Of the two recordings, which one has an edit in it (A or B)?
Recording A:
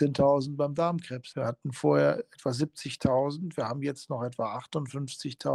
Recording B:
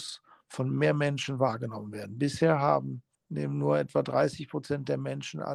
A